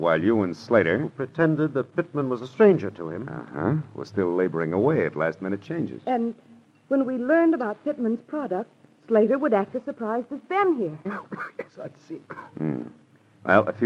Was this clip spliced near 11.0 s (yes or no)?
yes